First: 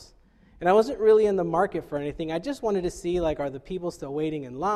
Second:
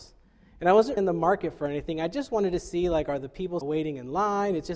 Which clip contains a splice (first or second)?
second